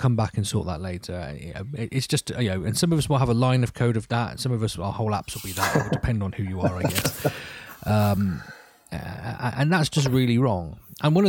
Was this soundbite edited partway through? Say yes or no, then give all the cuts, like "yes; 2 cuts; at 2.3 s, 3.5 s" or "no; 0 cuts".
no; 0 cuts